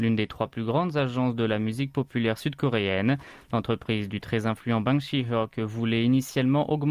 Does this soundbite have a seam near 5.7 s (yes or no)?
no